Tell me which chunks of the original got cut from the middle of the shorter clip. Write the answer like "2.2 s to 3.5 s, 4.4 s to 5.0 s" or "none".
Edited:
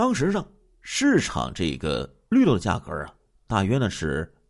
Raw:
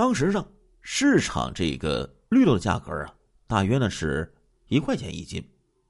none

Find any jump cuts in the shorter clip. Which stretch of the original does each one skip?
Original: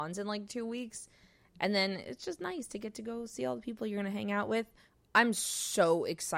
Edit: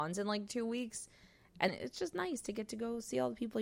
1.7 s to 1.9 s

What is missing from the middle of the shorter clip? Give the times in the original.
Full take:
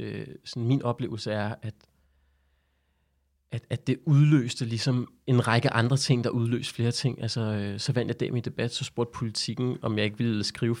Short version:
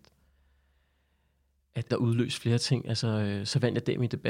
3.7 s to 6.2 s

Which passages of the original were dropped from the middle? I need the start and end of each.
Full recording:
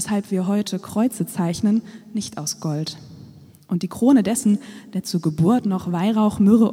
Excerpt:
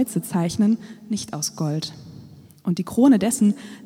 none

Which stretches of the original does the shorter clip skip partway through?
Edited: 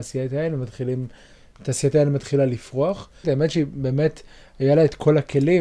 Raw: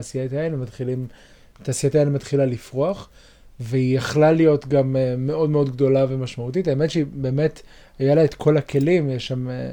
3.2 s to 6.6 s

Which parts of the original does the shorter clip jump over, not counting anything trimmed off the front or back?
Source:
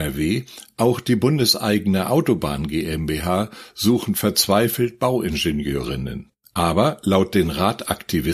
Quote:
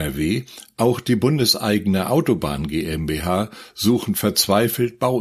none

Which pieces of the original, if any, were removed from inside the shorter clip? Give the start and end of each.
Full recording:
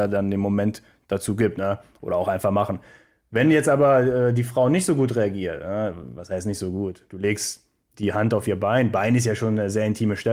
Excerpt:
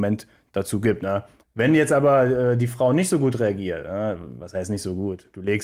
2.0 s to 3.2 s

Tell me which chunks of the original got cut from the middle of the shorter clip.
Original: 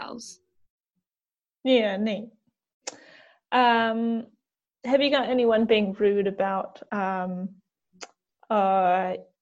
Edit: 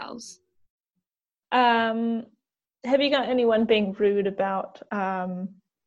1.4 s to 3.4 s

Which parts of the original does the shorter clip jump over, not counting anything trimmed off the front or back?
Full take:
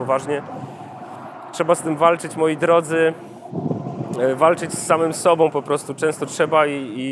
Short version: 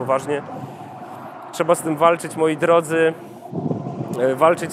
none

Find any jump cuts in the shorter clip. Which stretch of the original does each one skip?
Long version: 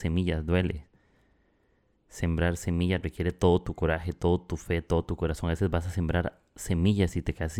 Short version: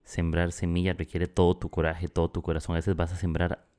4.1 s to 4.8 s

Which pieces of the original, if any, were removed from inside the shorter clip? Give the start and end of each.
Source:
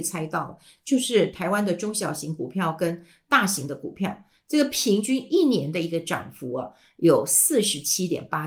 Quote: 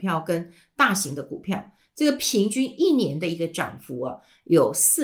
none

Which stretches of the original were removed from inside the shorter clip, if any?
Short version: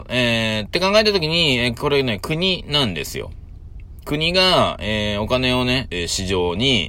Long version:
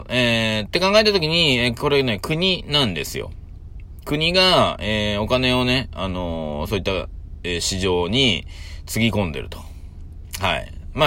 5.9 s to 7.4 s

